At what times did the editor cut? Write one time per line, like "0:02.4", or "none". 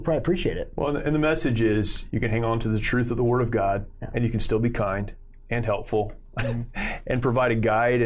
0:02.1

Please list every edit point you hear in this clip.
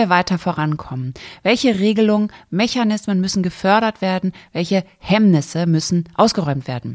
none

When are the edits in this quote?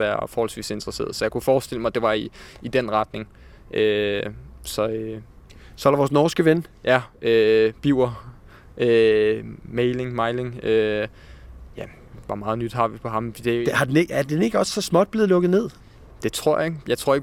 none

